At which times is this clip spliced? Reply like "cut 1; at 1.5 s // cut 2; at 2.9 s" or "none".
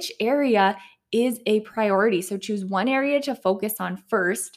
none

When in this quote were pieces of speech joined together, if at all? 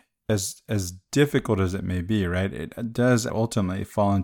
cut 1; at 3.3 s

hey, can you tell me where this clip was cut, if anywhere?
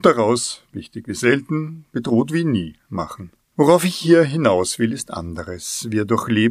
cut 1; at 3.4 s

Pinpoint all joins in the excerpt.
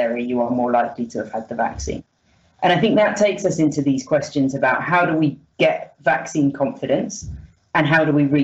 none

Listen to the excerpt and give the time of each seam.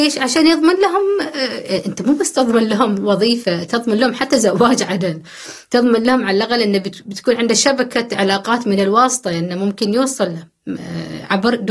none

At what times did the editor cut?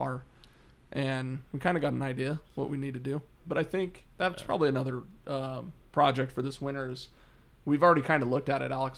cut 1; at 3.4 s

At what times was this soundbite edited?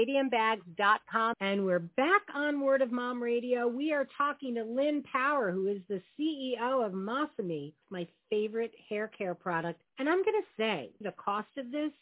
cut 1; at 1.3 s // cut 2; at 7.8 s // cut 3; at 11.0 s

